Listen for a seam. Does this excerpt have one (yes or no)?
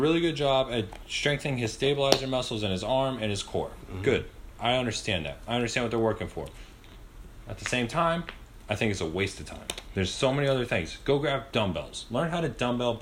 no